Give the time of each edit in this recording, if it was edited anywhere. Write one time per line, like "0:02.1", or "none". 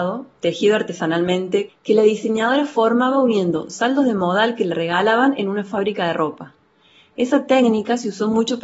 0:01.7